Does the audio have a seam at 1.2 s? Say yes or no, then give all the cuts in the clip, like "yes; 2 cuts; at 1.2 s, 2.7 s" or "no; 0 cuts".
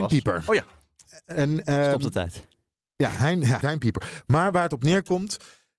no; 1 cut; at 3.6 s